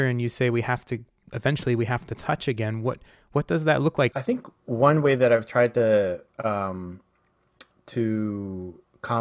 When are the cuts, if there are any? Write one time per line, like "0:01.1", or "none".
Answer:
0:04.1